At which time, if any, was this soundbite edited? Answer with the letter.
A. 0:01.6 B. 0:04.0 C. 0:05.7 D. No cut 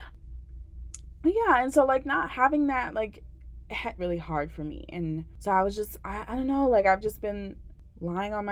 B